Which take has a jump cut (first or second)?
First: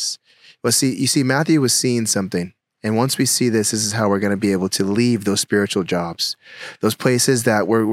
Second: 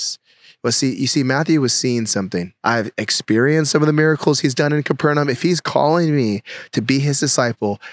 second